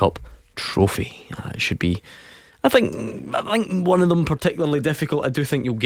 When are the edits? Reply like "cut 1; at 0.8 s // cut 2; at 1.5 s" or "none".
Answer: none